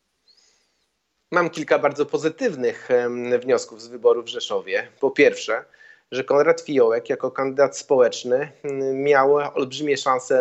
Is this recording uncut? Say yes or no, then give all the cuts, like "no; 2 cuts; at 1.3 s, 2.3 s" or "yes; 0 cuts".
yes; 0 cuts